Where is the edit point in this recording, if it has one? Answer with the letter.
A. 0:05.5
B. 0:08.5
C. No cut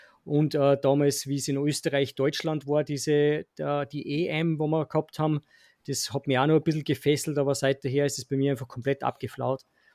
C